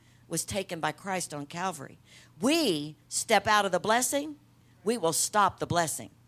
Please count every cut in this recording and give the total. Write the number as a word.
zero